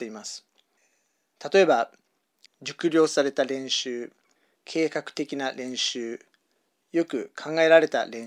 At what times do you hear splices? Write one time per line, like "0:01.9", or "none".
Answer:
0:02.5
0:04.6